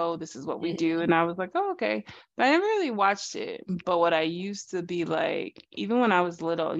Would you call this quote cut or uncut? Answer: uncut